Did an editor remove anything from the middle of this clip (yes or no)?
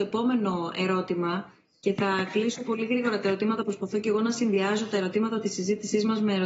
no